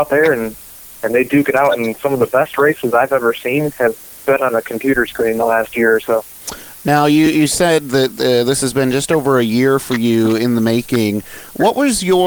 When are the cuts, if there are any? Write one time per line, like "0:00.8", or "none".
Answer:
none

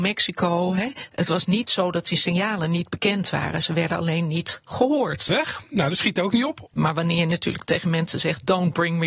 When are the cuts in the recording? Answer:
0:05.3
0:06.7

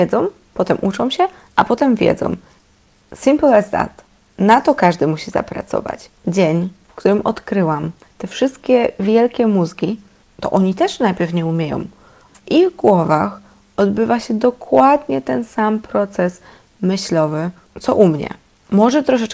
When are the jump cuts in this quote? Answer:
0:04.3
0:06.1
0:08.0

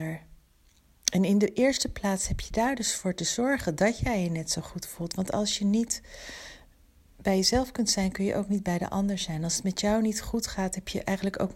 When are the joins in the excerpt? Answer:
none

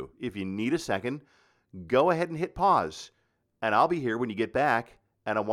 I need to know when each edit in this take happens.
none

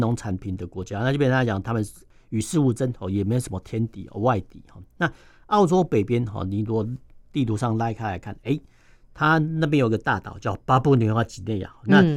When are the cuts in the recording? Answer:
none

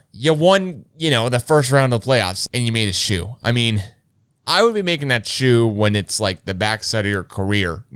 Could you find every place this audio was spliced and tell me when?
0:02.5

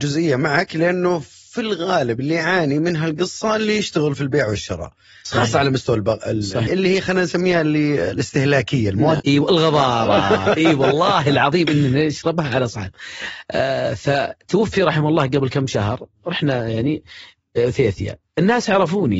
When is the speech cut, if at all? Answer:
0:06.7
0:09.2

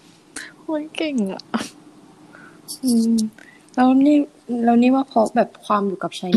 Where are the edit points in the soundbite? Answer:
none

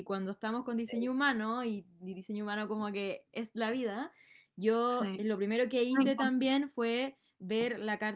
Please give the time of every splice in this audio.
none

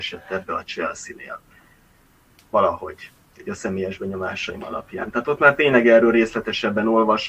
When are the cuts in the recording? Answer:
none

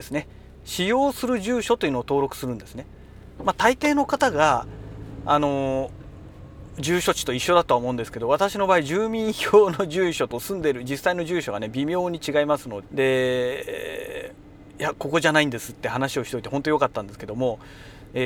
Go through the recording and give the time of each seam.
0:12.8

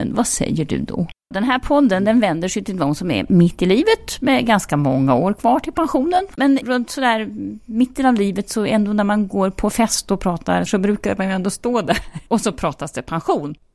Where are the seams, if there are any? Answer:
0:01.3
0:06.4
0:10.7

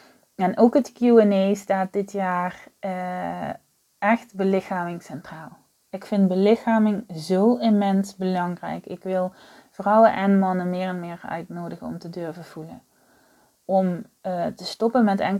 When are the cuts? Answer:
none

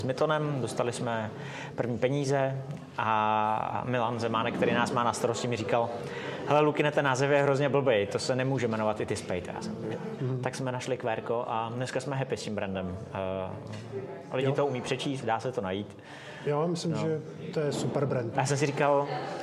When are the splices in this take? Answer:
0:10.2
0:15.2
0:18.3

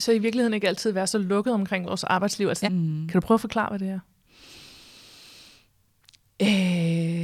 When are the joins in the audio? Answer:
0:02.6

